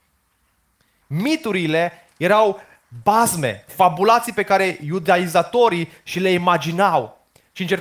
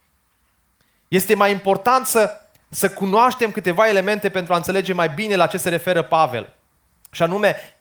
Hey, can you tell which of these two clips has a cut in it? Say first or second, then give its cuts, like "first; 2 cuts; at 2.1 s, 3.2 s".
first; 2 cuts; at 1.0 s, 3.7 s